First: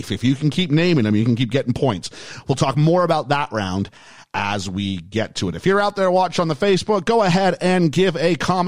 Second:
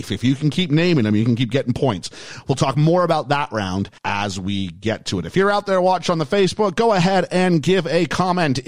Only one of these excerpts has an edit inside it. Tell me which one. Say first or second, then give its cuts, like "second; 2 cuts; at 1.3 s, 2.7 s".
second; 1 cut; at 4.0 s